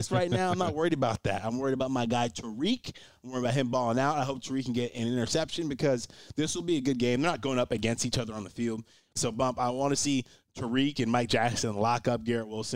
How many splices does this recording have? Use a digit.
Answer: 1